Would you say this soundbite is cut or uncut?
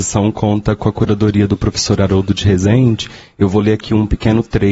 uncut